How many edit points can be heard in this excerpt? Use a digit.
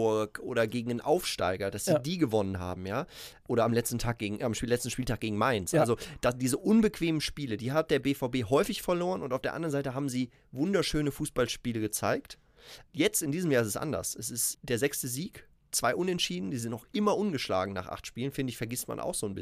1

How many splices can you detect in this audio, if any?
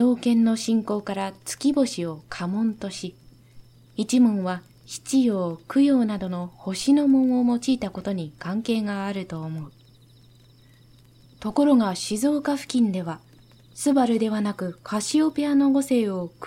0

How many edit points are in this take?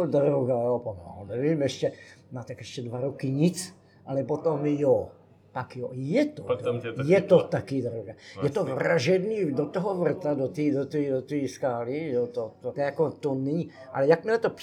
1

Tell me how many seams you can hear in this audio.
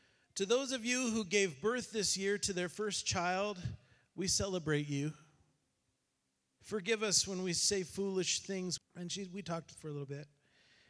2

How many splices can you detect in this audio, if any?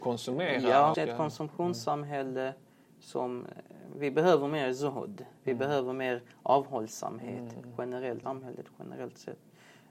2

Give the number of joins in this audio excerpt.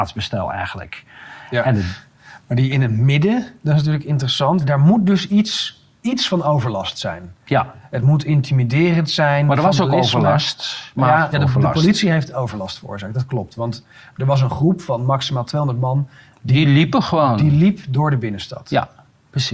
2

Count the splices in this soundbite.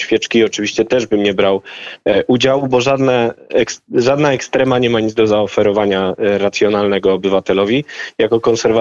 0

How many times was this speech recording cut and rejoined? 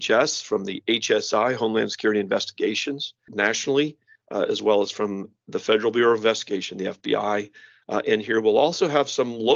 1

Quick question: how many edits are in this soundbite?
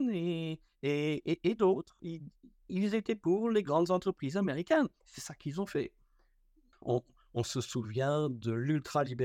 2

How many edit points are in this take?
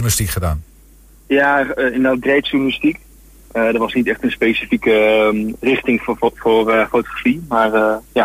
0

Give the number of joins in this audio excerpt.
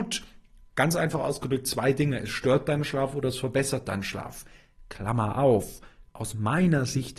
0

